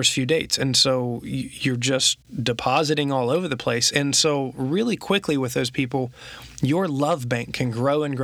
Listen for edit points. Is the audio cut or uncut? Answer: uncut